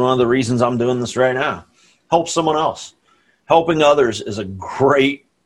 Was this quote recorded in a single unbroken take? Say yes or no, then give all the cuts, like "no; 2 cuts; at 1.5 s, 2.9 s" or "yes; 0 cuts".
yes; 0 cuts